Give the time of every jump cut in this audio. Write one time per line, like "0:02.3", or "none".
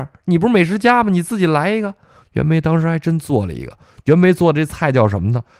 none